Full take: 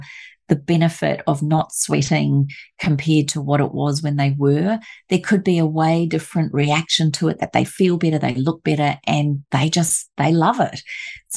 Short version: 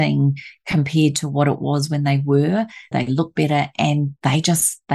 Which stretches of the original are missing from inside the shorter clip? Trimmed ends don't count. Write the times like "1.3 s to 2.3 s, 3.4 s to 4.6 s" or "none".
5.0 s to 8.2 s